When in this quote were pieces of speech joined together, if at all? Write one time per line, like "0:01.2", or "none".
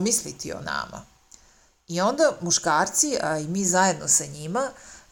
none

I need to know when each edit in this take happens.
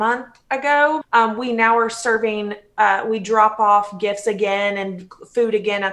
0:01.0

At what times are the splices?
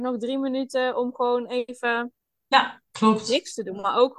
none

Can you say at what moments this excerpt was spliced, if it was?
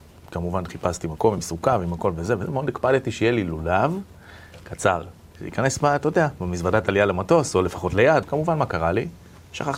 0:08.2

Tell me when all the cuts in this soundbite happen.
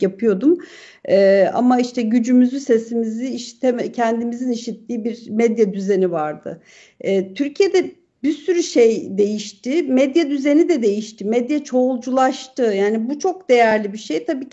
none

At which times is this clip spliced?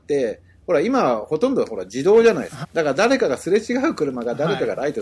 0:02.6

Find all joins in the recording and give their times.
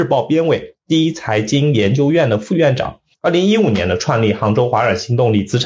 0:03.1

